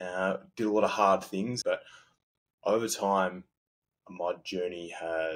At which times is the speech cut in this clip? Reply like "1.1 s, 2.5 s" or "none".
1.6 s